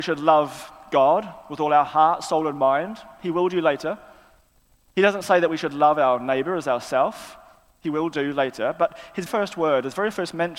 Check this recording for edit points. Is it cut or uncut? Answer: cut